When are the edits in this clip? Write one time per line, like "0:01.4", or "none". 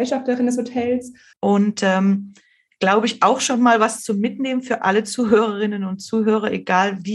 0:01.3